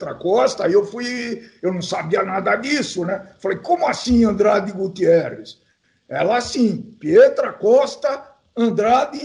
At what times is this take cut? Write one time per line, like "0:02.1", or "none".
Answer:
none